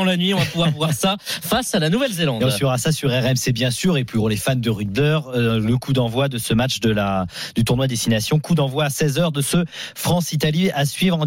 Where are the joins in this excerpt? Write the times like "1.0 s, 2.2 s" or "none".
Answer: 4.9 s

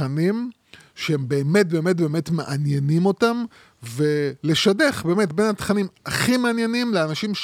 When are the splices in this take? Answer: none

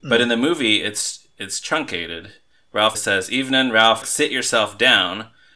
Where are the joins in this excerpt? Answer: 2.9 s, 4.0 s

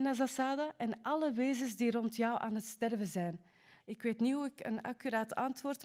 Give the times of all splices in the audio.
3.8 s

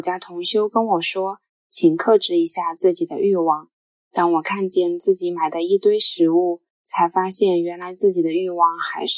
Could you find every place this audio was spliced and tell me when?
none

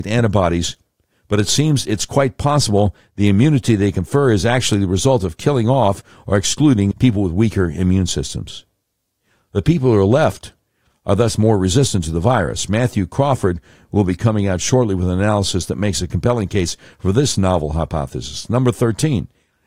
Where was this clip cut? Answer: 6.9 s

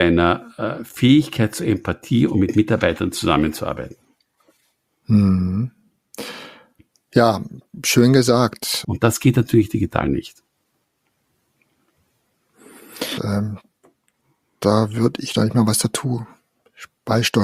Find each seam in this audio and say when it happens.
8.8 s, 13.2 s

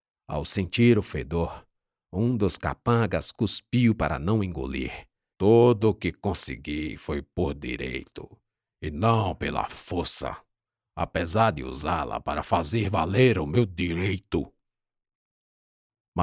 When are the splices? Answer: 5.3 s

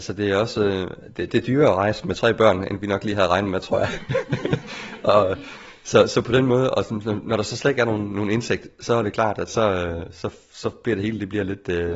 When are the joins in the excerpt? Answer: none

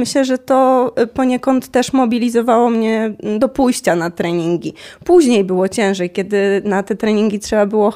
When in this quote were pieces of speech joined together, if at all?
none

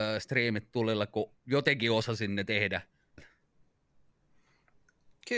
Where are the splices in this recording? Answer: 3.2 s

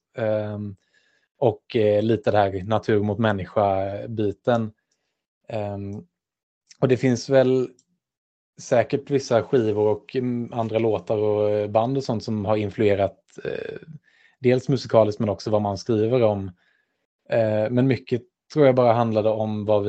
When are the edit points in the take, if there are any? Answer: none

